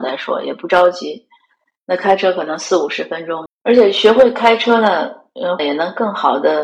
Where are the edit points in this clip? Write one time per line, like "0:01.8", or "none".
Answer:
0:01.8
0:03.5
0:05.6